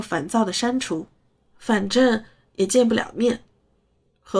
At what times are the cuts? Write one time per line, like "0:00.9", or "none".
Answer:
none

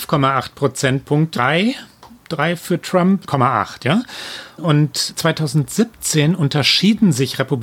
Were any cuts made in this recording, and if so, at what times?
0:01.4
0:03.3
0:04.6

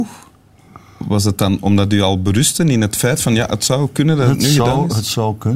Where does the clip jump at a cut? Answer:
none

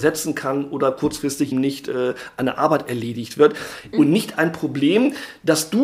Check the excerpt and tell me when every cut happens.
0:01.5
0:03.9

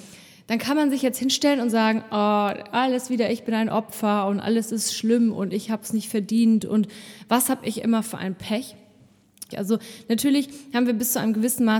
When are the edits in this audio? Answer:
0:09.5

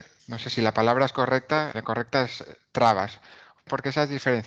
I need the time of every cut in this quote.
0:01.7

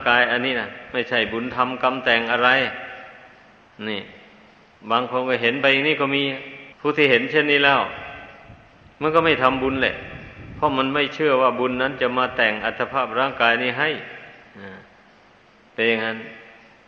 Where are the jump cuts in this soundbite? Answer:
0:06.7

